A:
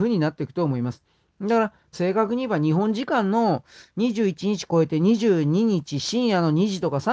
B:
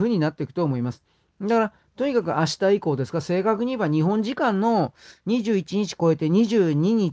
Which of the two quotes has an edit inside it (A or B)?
A